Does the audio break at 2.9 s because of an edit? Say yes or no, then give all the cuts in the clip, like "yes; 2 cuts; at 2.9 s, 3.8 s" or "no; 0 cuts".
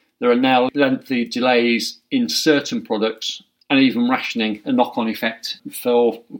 no; 1 cut; at 4.6 s